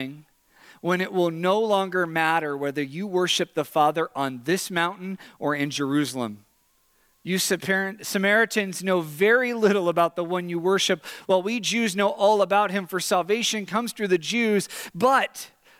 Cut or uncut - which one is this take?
uncut